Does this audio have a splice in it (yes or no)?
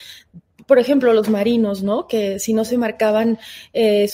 no